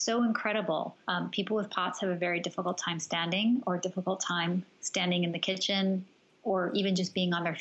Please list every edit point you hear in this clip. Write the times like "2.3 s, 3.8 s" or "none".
1.0 s